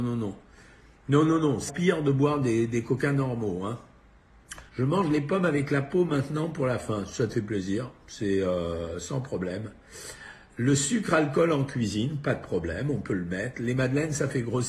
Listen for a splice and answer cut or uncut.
cut